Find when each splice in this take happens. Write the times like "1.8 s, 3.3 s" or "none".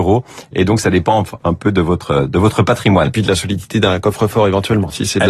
1.4 s